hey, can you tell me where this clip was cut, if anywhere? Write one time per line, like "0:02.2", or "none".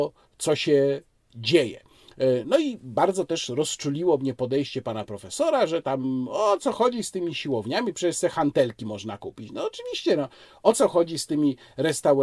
none